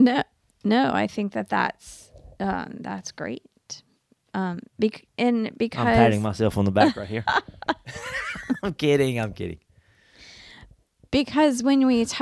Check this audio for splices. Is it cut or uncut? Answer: uncut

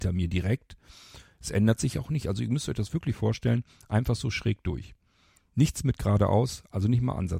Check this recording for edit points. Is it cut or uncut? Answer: cut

